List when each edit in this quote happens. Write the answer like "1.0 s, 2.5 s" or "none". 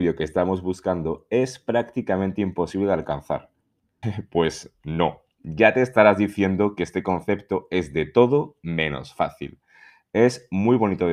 4.0 s